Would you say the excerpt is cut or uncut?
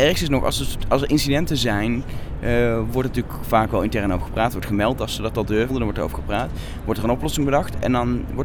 cut